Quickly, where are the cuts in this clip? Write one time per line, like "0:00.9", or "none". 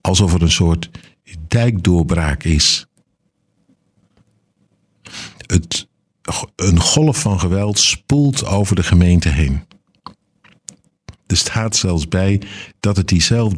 none